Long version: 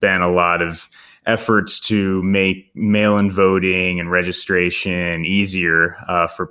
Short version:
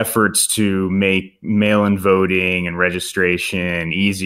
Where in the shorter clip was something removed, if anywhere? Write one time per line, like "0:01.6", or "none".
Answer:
none